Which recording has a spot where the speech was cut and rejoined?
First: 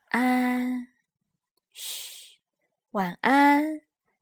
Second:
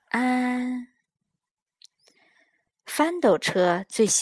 first; 1 cut; at 1.6 s

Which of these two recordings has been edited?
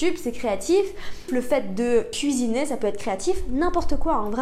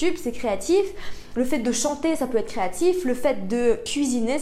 first; 1 cut; at 1.3 s

